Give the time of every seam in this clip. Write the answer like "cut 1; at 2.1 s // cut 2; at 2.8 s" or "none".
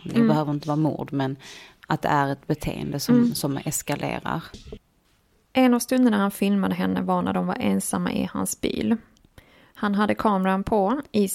none

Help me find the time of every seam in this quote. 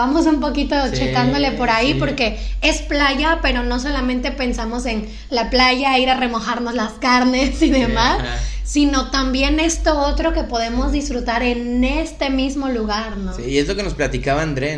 none

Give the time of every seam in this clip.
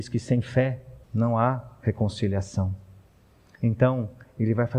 cut 1; at 1.0 s

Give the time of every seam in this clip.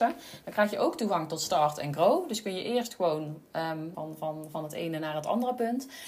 cut 1; at 3.9 s

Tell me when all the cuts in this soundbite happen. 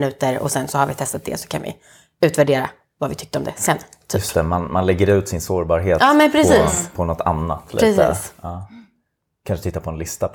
none

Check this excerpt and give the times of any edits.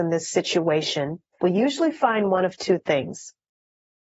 cut 1; at 1.4 s

